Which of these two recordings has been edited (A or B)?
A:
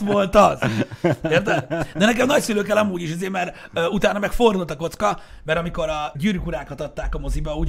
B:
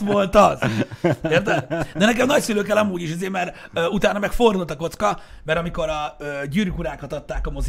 A